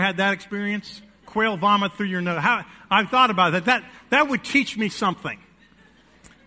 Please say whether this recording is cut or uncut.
uncut